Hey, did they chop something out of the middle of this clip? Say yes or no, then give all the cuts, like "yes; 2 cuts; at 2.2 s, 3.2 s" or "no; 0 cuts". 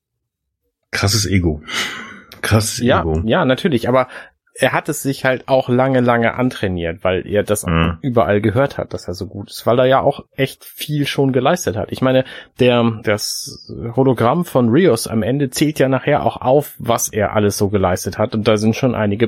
yes; 1 cut; at 13.0 s